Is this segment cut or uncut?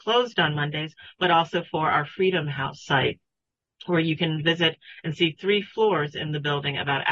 uncut